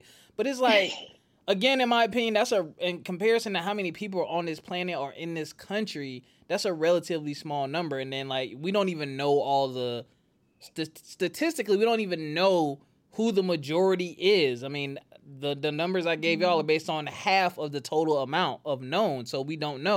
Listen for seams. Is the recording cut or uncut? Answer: uncut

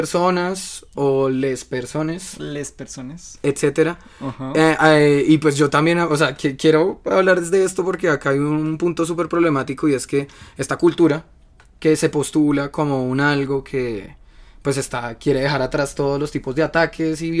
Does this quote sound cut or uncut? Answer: uncut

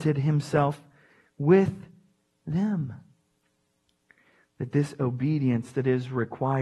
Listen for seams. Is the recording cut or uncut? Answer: uncut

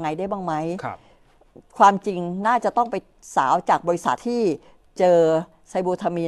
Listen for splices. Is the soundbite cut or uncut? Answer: cut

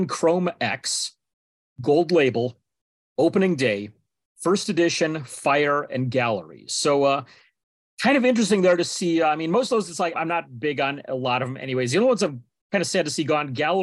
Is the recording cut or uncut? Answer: cut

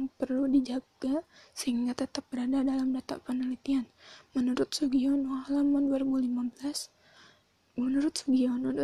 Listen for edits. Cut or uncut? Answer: uncut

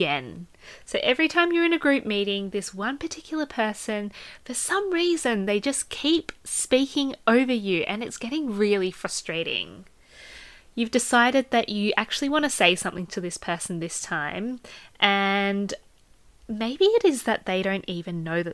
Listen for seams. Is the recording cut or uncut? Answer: uncut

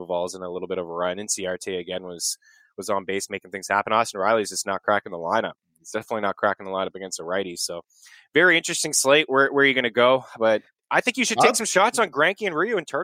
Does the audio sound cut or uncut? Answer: uncut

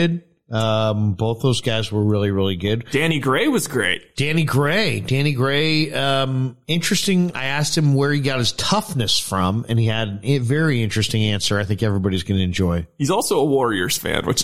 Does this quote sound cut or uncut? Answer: uncut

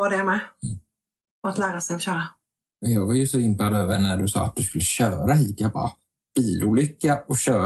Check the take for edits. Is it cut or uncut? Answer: uncut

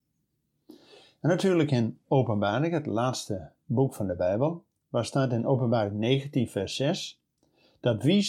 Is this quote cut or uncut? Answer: uncut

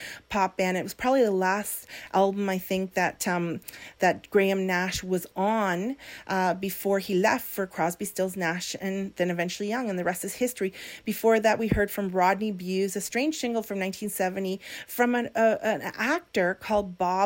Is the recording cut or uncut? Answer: uncut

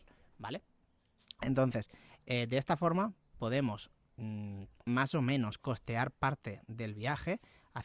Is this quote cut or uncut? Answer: cut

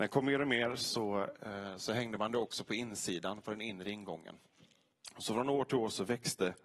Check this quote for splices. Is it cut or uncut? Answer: uncut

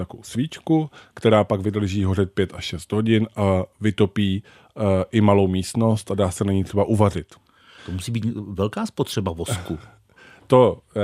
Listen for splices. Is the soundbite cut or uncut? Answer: cut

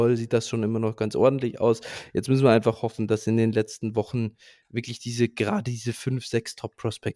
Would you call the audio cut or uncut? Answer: uncut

